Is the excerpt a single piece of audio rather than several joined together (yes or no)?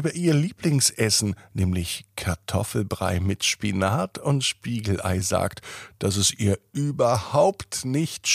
yes